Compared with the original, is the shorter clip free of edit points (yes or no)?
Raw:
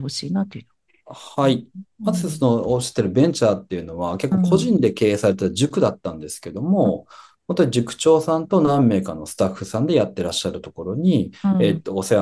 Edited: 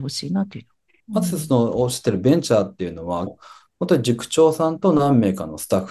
no